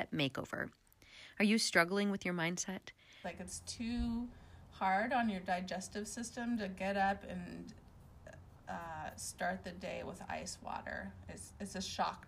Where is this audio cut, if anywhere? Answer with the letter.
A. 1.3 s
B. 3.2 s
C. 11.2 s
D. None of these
B